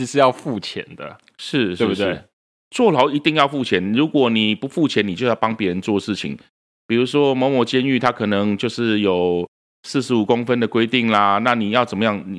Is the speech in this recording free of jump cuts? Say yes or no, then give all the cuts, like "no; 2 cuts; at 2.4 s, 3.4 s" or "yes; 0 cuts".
yes; 0 cuts